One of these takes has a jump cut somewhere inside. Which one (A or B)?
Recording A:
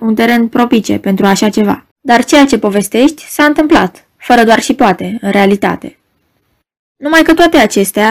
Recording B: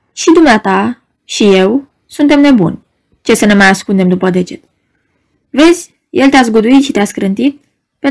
A